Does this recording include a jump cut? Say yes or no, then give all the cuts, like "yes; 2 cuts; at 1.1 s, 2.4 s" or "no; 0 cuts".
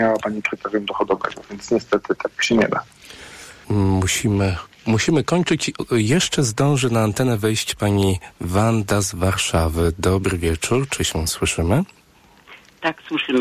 yes; 1 cut; at 3.6 s